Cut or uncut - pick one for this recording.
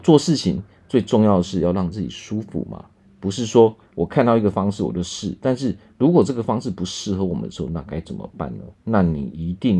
uncut